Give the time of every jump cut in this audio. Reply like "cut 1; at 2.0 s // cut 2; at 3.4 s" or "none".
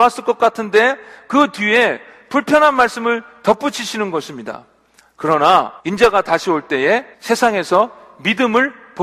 cut 1; at 5.8 s // cut 2; at 7.1 s